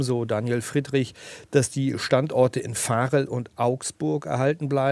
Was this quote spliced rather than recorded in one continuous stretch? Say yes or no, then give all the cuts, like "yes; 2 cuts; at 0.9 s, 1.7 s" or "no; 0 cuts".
no; 0 cuts